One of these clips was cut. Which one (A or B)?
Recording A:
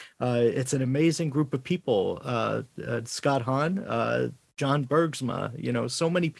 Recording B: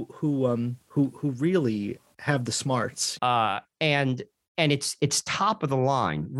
B